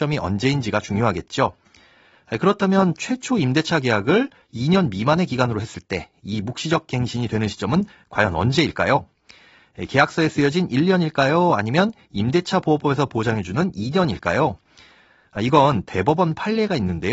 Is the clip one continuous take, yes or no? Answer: yes